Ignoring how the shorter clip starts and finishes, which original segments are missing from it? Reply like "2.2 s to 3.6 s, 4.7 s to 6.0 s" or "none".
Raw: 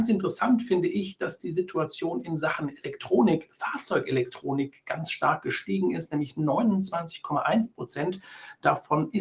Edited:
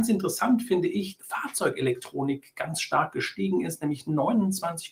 1.2 s to 3.5 s